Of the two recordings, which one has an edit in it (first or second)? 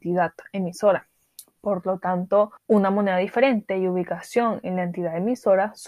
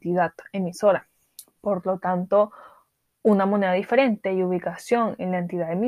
first